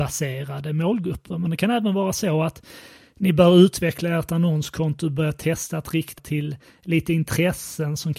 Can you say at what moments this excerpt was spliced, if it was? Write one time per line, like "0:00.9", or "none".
0:06.2